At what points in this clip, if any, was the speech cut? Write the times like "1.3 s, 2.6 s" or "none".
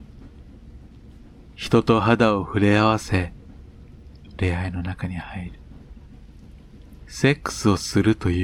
4.4 s, 7.0 s